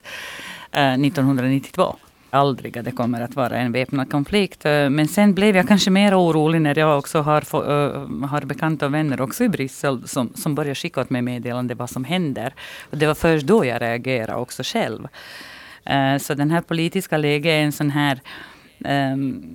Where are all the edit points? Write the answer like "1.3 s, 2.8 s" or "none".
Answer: 2.3 s